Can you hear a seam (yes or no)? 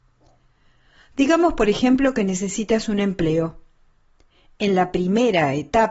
no